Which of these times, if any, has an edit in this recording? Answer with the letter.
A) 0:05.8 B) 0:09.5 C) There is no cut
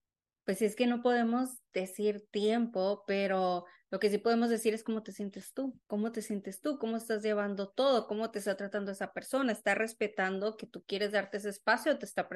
A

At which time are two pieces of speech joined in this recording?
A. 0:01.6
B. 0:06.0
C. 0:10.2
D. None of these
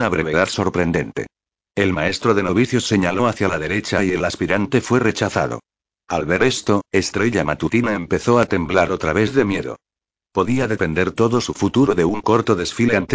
C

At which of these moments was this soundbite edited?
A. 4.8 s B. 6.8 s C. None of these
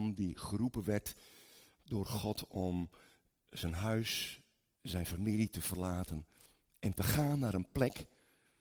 A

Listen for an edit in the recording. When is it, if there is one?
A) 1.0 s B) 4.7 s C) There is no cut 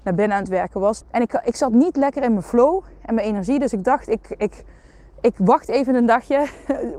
A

